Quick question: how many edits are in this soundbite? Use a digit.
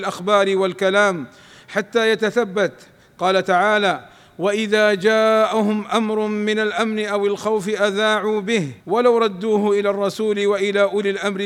1